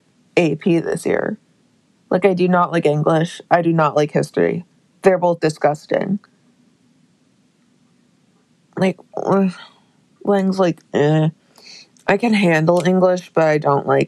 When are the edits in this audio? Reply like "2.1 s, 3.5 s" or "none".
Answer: none

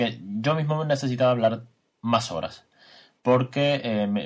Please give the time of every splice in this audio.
none

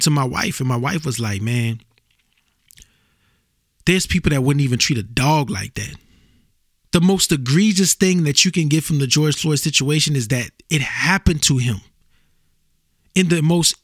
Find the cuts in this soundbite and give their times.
6.8 s

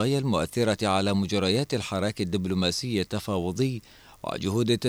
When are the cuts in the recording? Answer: none

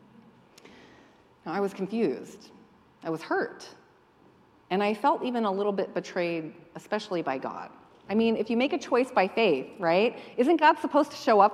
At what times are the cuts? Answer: none

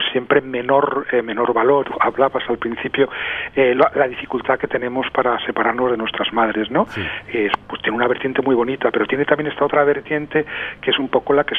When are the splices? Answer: 1.8 s

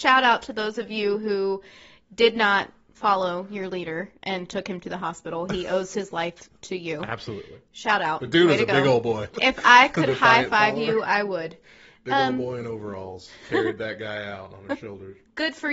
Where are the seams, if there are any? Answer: 9.3 s

